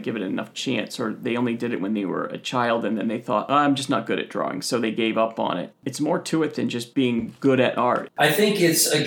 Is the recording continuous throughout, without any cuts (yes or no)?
no